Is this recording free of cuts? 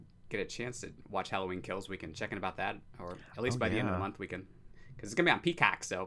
yes; 0 cuts

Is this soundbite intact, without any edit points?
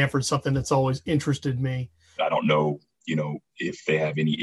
no; 1 cut; at 2.2 s

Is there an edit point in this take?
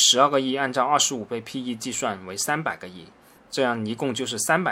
no; 0 cuts

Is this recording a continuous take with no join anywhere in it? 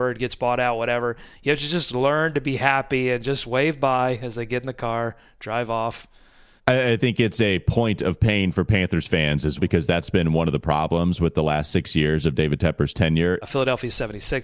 no; 3 cuts; at 6.6 s, 9.6 s, 13.4 s

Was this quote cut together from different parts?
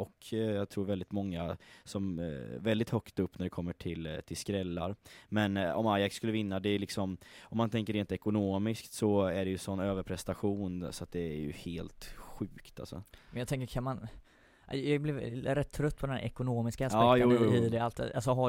no; 0 cuts

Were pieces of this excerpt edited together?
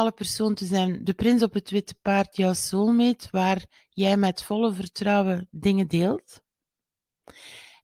no; 0 cuts

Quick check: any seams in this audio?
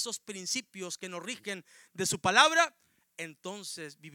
no; 0 cuts

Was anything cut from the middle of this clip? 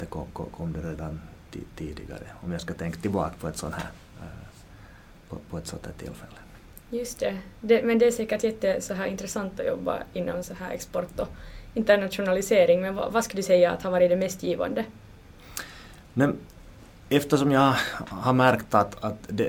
no; 0 cuts

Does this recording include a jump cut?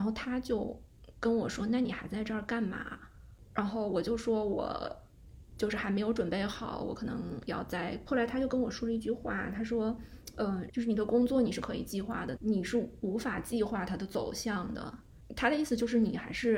yes; 3 cuts; at 8.1 s, 10.7 s, 12.4 s

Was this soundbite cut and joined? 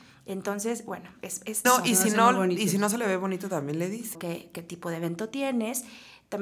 yes; 2 cuts; at 1.6 s, 4.1 s

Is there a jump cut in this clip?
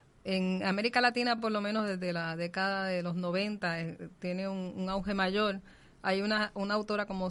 no; 0 cuts

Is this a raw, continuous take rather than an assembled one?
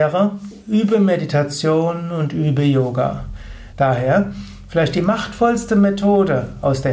no; 1 cut; at 3.7 s

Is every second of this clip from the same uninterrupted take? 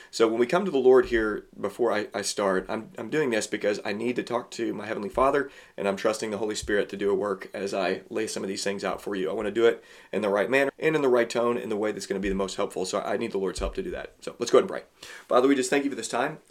no; 1 cut; at 10.7 s

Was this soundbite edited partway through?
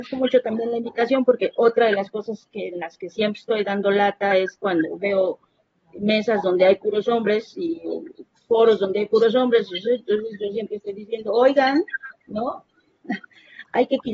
no; 0 cuts

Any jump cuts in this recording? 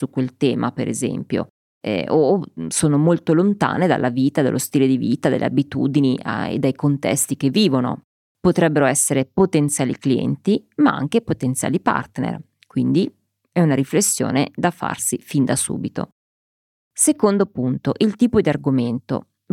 yes; 1 cut; at 8.3 s

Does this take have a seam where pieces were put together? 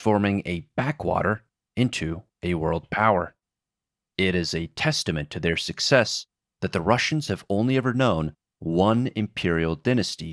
no; 0 cuts

